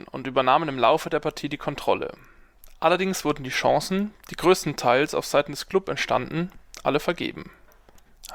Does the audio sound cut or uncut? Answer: uncut